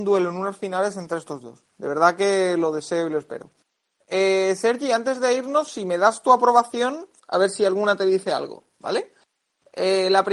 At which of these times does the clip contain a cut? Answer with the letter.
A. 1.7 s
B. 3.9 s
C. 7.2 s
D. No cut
C